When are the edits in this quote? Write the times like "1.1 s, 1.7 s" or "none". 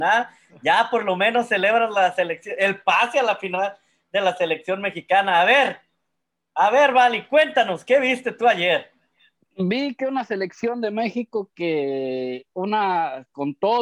none